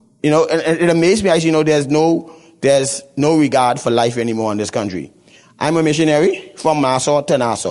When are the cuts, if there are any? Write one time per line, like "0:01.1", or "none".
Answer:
none